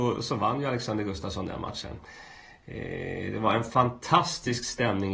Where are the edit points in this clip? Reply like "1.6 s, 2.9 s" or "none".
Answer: none